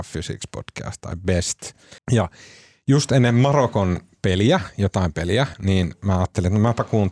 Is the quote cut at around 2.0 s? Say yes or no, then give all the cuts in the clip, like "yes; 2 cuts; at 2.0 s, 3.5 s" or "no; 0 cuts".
yes; 2 cuts; at 2.0 s, 5.5 s